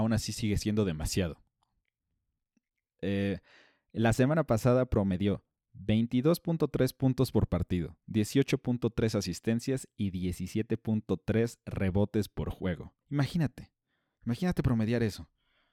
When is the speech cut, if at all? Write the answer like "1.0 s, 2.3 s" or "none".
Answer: 13.0 s